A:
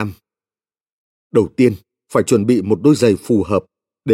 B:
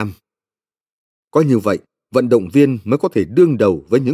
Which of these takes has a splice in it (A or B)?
B